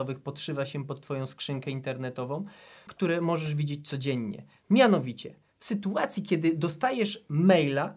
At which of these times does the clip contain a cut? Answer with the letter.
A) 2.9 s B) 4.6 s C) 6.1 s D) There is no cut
A